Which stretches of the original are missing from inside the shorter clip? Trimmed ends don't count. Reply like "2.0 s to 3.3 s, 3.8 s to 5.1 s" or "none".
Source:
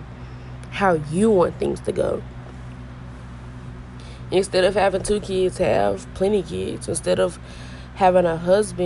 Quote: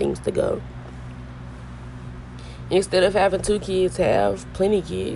none